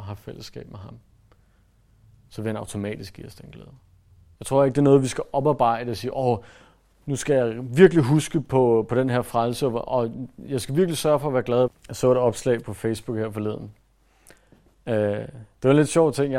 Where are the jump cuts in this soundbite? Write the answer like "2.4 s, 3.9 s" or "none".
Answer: 4.4 s, 11.7 s